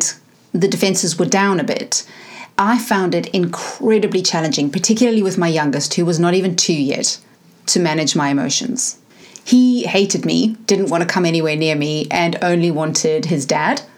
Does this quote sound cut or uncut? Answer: uncut